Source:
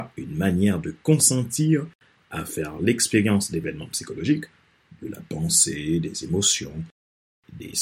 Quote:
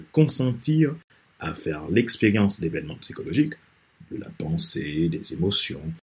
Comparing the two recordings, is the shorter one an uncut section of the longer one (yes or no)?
yes